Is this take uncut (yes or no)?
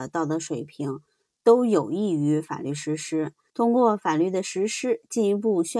no